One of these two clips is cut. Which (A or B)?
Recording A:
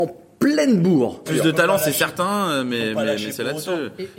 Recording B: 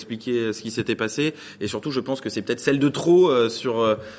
A